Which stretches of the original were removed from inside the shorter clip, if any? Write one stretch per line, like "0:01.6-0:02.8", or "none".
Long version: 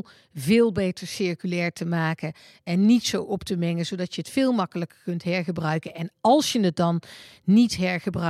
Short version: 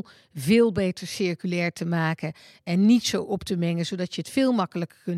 none